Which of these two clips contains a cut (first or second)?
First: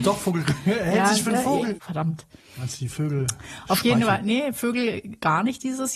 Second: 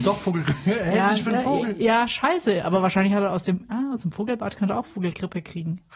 first